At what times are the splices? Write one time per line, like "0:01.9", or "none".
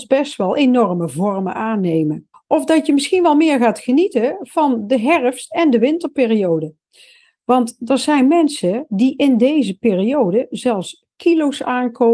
0:02.3

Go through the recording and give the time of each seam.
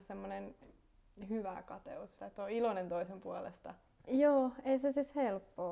0:02.2
0:04.0

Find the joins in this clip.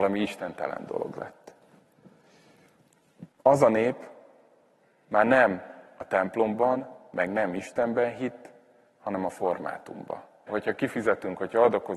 0:03.3
0:10.5

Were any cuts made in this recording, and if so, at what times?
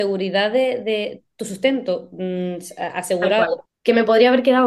0:03.6

